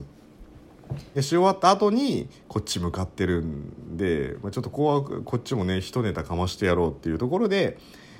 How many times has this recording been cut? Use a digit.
2